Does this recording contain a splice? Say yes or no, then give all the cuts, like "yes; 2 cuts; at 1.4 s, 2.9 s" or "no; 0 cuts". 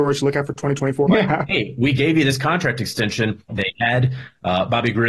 yes; 2 cuts; at 1.1 s, 3.5 s